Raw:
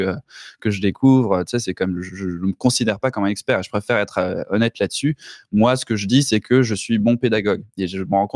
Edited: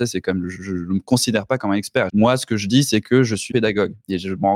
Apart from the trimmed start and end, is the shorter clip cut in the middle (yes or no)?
yes